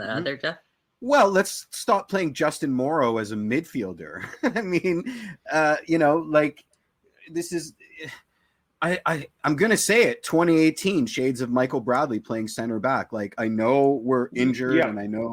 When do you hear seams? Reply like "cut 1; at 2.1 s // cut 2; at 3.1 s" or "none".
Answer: none